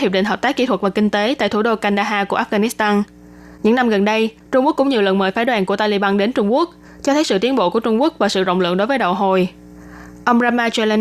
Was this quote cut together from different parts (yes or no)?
no